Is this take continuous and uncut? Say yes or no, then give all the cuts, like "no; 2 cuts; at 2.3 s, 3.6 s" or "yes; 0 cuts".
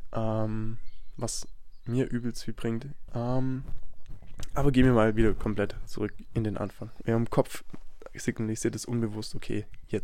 no; 2 cuts; at 3.1 s, 7.0 s